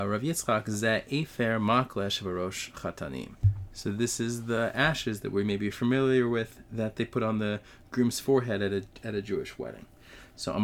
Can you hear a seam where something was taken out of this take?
no; 0 cuts

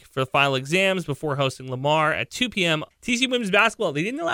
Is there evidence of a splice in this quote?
yes; 1 cut; at 2.9 s

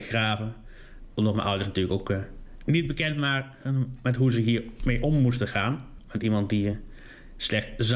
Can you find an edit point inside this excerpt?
no; 0 cuts

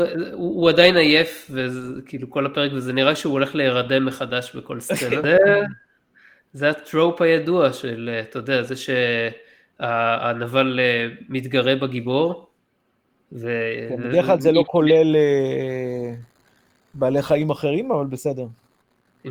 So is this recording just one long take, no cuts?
no; 1 cut; at 5.2 s

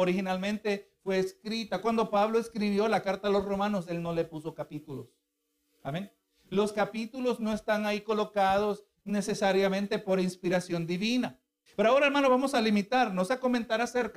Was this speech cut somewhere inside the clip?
yes; 1 cut; at 11.7 s

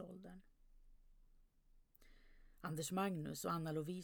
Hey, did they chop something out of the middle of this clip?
no; 0 cuts

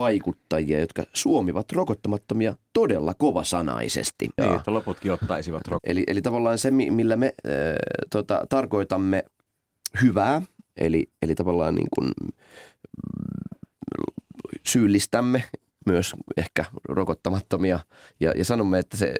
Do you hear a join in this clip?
yes; 2 cuts; at 4.4 s, 5.8 s

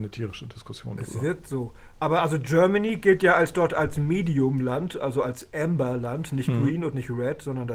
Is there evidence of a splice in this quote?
no; 0 cuts

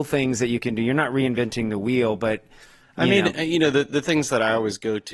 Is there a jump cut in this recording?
no; 0 cuts

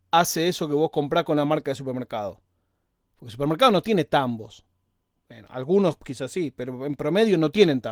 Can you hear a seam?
no; 0 cuts

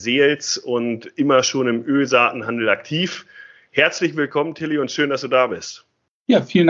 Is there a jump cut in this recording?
no; 0 cuts

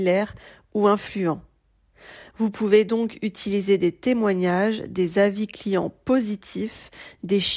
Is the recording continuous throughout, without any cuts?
yes; 0 cuts

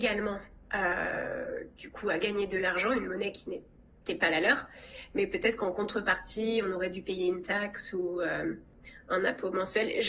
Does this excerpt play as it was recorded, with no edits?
yes; 0 cuts

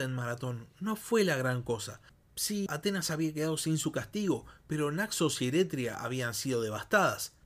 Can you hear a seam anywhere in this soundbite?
yes; 1 cut; at 2.7 s

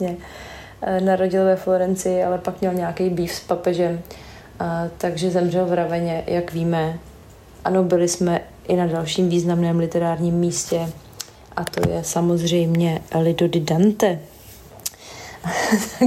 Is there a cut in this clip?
no; 0 cuts

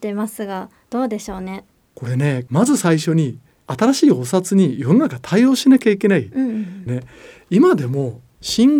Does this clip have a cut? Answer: yes; 1 cut; at 6.9 s

